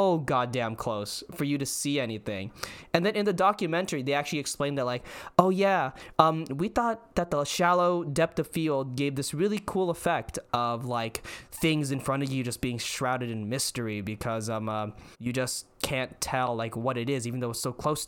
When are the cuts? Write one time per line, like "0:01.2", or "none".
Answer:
0:15.1